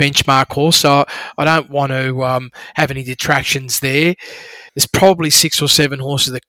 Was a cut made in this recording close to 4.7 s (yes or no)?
yes